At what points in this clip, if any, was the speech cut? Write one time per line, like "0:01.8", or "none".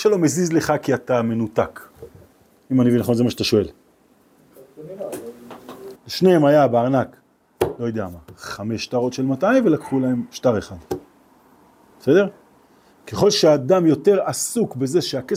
0:05.9